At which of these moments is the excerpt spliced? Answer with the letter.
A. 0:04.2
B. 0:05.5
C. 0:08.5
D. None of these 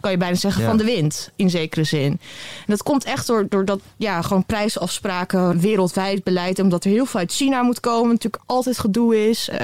B